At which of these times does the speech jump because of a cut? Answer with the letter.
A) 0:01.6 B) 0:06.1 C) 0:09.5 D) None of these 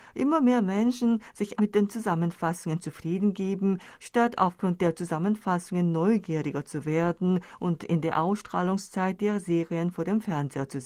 A